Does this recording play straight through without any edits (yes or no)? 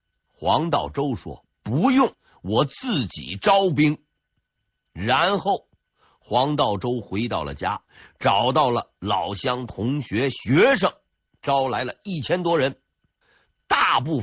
yes